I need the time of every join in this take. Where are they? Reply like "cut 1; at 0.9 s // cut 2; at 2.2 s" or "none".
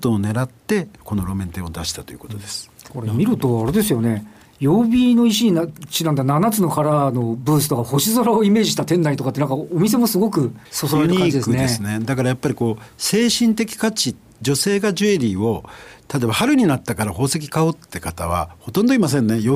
cut 1; at 10.7 s